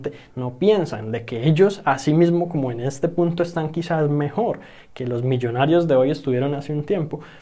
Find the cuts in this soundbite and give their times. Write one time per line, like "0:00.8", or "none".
none